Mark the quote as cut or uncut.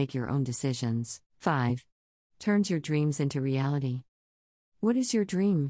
cut